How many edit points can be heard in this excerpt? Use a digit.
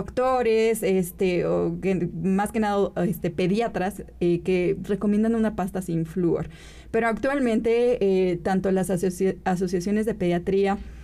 0